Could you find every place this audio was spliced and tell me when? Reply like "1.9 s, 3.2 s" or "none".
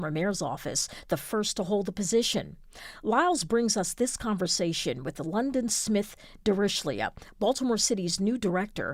none